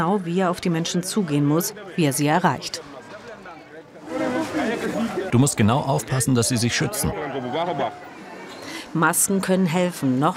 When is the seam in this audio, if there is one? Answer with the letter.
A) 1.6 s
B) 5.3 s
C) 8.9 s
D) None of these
B